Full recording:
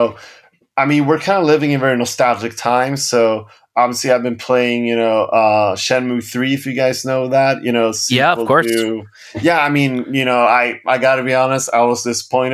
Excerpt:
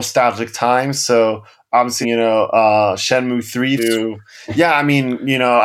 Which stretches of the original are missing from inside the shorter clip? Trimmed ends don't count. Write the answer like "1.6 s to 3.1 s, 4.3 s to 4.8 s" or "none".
4.0 s to 4.8 s, 6.6 s to 8.6 s